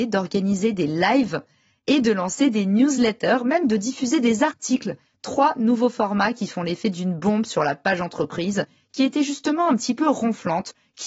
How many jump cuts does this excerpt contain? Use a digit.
0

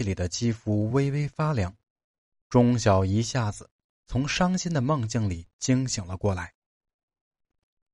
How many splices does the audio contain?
0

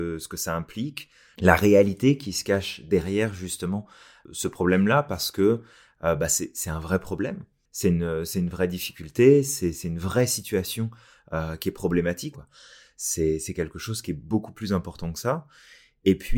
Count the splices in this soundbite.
1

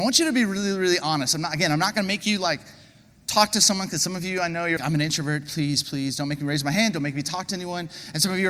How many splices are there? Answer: 2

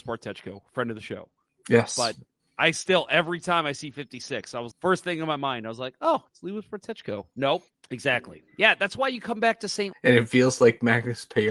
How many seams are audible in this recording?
3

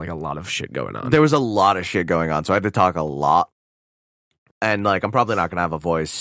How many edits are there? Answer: 1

